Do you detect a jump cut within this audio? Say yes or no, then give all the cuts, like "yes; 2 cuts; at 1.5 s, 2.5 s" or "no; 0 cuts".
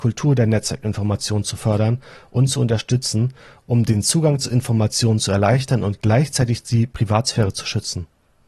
no; 0 cuts